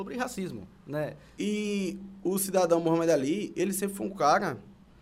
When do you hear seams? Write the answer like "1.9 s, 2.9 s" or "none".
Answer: 1.4 s